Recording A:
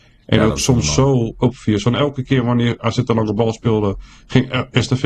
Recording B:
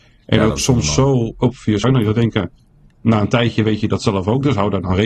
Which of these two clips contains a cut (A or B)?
B